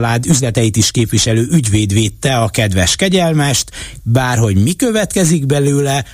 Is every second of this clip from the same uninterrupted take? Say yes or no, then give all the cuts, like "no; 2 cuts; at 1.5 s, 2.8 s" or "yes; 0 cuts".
no; 1 cut; at 4.0 s